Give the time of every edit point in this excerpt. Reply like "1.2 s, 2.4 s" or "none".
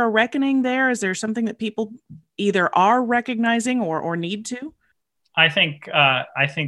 none